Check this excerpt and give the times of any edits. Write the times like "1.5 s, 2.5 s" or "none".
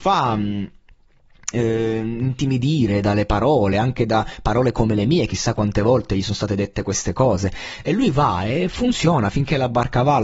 none